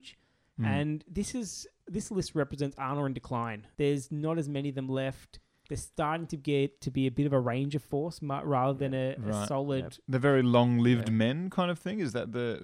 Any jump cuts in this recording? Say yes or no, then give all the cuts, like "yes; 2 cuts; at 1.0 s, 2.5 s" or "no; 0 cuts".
yes; 1 cut; at 3.7 s